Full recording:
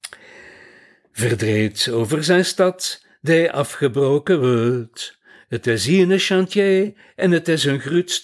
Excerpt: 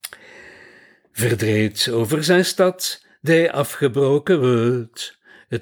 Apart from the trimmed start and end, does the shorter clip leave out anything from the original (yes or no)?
no